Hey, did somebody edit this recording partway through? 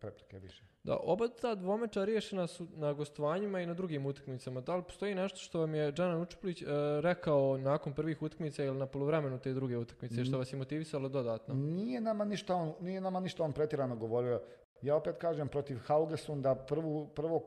no; 0 cuts

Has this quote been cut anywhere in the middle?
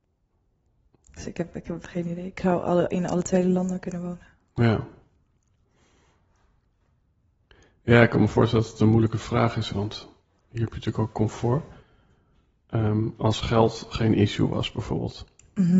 yes; 1 cut; at 9.7 s

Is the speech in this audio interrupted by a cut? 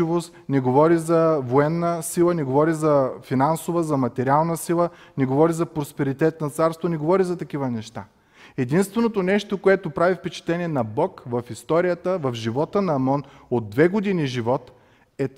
no; 0 cuts

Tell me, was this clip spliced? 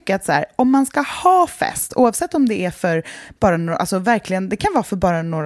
no; 0 cuts

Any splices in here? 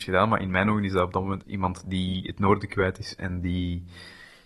yes; 1 cut; at 1.4 s

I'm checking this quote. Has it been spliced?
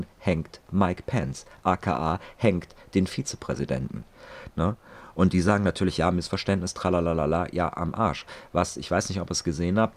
yes; 1 cut; at 4.5 s

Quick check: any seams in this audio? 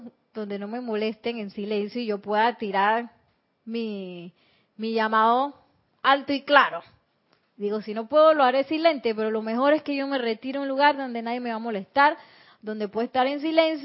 no; 0 cuts

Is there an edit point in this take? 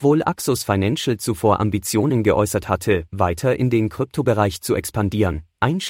no; 0 cuts

